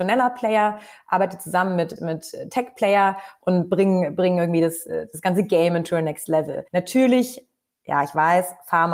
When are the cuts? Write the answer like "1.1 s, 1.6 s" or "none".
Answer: 2.0 s, 6.7 s